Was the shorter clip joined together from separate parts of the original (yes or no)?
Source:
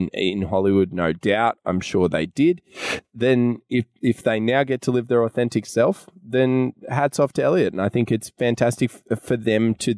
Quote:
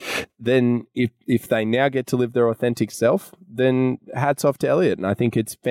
no